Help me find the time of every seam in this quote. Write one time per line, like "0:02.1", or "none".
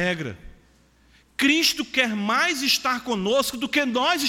none